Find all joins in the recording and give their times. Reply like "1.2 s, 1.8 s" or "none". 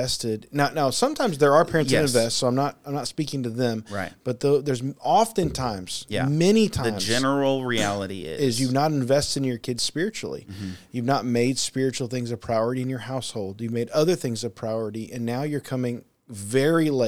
none